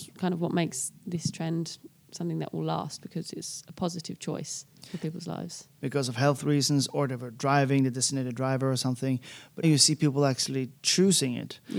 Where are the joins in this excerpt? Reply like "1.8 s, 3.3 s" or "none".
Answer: 5.7 s, 9.6 s